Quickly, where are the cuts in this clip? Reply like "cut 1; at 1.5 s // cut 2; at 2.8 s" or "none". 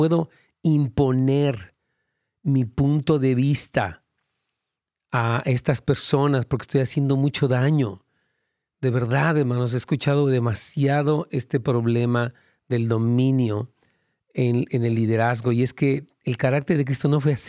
none